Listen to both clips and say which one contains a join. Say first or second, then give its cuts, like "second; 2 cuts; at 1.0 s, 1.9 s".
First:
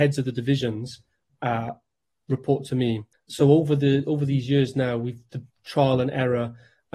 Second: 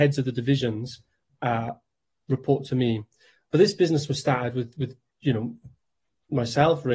first; 2 cuts; at 3.1 s, 5.5 s